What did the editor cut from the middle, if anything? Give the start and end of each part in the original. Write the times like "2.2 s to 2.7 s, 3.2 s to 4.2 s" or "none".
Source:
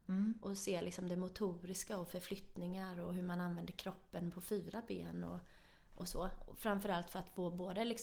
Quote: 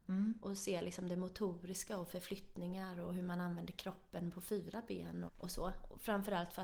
5.3 s to 5.8 s